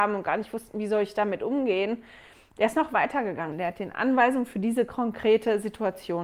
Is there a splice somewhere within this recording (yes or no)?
yes